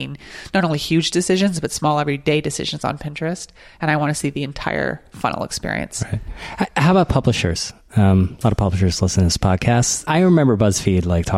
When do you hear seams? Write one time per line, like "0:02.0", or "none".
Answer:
0:10.1